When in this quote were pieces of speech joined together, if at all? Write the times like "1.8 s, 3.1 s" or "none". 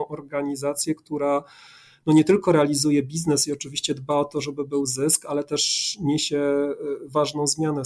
none